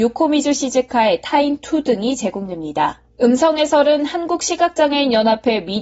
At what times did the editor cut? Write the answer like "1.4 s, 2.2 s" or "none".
3.1 s